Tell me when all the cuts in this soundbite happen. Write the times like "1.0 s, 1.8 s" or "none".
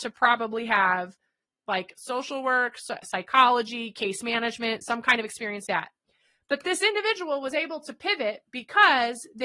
5.7 s